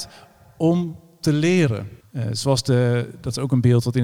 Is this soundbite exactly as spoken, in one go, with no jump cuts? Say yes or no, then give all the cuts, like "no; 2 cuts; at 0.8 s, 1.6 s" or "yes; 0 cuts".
no; 1 cut; at 2.0 s